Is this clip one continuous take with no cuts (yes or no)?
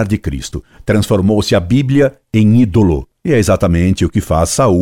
yes